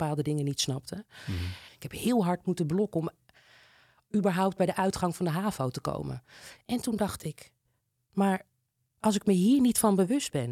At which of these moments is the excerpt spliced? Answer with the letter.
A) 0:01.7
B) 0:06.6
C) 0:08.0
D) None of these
A